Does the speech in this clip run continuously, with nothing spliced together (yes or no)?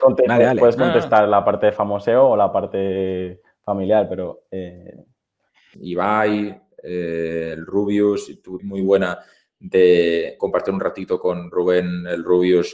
no